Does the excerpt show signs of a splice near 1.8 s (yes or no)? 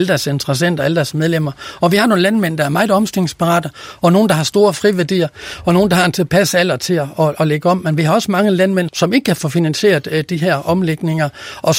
no